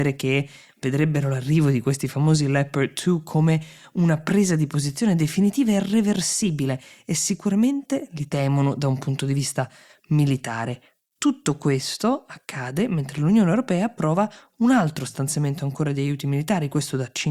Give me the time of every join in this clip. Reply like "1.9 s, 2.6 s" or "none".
none